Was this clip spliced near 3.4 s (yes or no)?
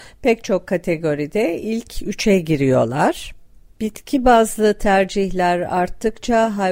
no